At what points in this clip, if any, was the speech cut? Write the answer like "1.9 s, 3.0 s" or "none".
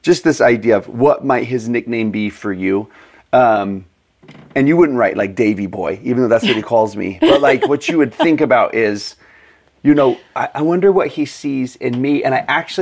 none